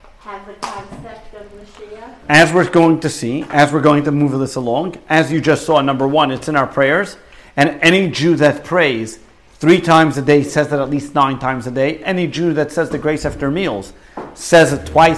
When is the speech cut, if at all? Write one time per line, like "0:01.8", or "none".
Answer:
none